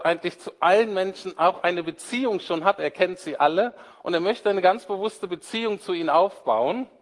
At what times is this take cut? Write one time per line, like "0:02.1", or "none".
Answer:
0:02.8